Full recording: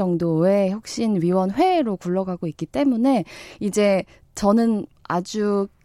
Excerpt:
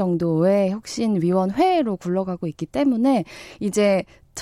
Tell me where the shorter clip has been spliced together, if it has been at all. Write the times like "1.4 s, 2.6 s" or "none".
none

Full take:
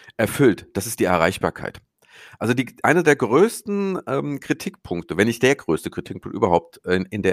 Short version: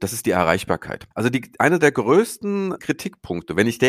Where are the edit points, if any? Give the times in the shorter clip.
1.1 s, 2.8 s

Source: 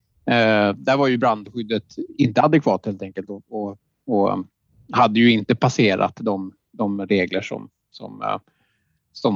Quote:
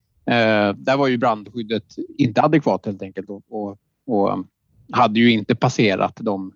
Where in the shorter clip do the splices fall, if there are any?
none

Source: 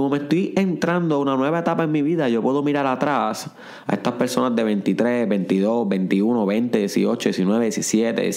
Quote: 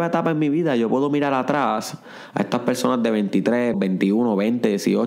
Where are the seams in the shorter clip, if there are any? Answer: 3.7 s

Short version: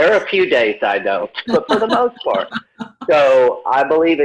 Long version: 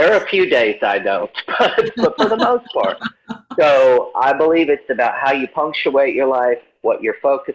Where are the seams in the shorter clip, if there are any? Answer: 1.5 s

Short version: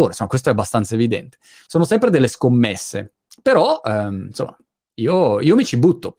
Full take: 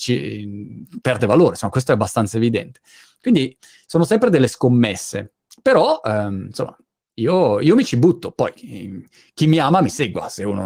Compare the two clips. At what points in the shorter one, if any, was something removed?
1.7 s

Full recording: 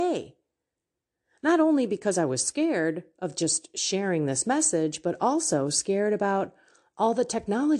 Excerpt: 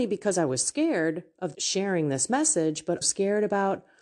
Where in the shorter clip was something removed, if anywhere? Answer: 1.5 s, 3.0 s

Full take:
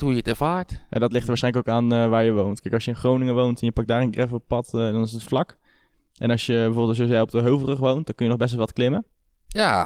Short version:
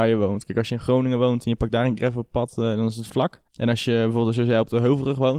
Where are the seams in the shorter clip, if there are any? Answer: 3.5 s

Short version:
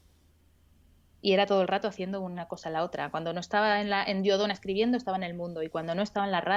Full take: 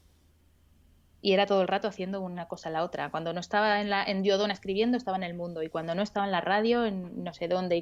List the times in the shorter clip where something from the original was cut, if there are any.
none

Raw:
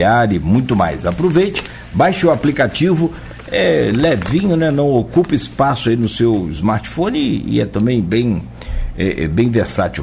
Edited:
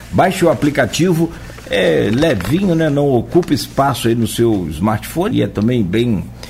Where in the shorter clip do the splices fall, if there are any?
5.3 s

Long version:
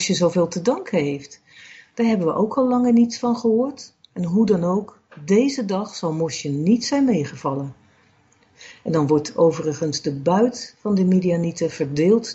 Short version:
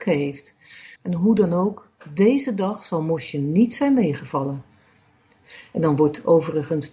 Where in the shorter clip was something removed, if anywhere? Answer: 1.0 s

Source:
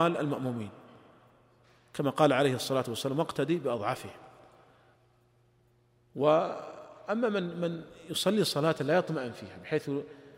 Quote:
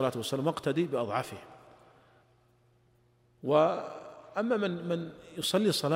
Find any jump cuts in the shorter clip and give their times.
none

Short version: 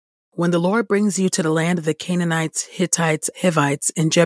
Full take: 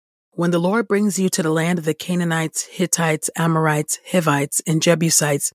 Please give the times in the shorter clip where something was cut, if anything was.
3.3 s

